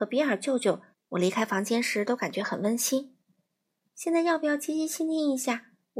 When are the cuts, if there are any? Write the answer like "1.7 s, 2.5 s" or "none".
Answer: 0.9 s, 3.8 s